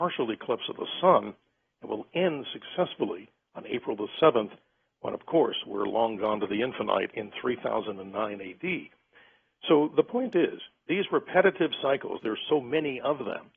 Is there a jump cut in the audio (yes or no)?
no